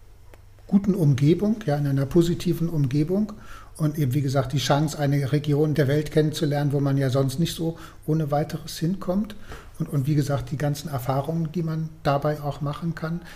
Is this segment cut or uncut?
cut